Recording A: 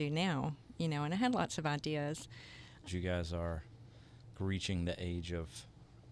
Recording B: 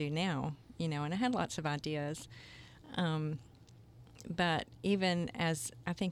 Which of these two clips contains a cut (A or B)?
A